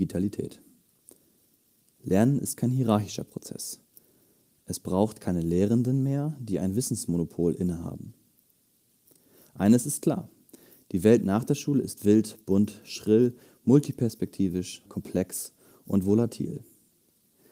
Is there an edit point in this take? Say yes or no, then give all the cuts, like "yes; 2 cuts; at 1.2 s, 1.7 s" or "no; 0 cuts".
yes; 1 cut; at 14.9 s